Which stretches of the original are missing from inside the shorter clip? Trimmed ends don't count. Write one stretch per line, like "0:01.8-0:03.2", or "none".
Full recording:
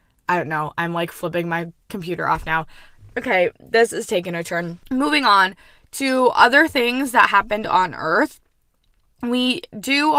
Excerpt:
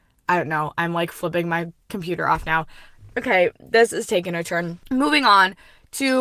none

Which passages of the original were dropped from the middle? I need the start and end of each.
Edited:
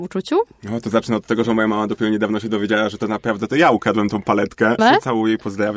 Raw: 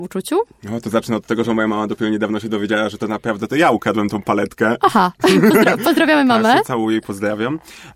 0:04.8-0:06.4

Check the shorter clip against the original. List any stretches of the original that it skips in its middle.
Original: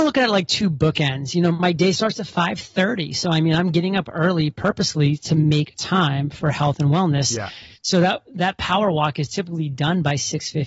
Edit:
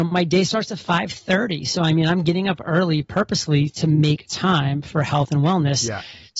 none

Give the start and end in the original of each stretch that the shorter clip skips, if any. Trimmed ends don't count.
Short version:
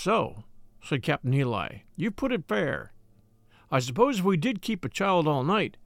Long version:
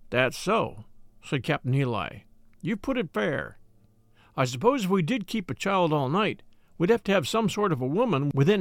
0:02.3-0:02.5

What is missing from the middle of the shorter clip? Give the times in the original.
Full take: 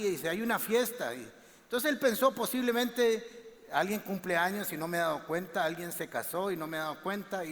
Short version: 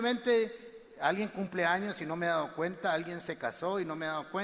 none

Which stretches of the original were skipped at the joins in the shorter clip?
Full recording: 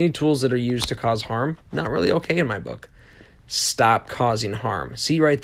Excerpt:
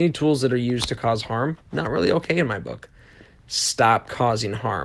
none

